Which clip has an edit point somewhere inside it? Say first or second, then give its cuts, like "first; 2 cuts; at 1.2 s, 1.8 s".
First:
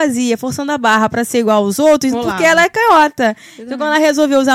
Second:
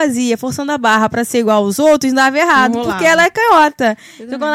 first; 1 cut; at 2.1 s